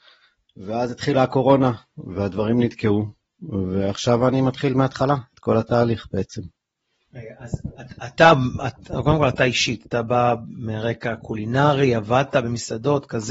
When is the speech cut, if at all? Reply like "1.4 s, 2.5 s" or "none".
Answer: none